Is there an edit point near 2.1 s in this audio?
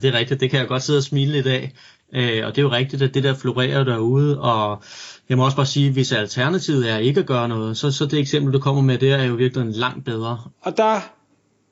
no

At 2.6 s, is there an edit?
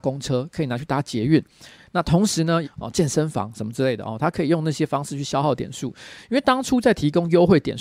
yes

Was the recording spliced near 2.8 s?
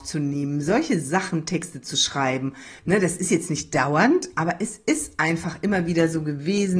yes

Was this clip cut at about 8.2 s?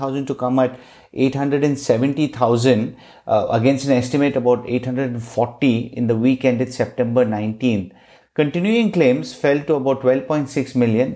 yes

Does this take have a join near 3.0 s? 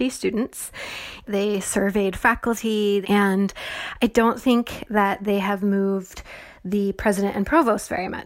yes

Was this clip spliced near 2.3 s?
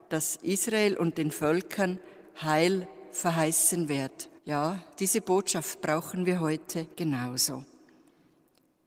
no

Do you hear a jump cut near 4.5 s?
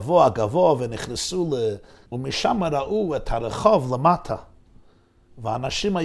no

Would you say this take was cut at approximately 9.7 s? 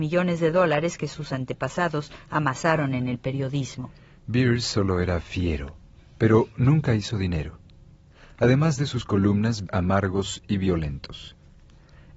yes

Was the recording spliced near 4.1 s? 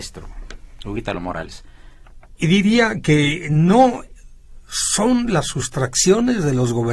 no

